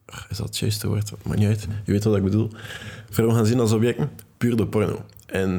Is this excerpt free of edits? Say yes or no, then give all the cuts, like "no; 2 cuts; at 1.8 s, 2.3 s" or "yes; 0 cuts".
yes; 0 cuts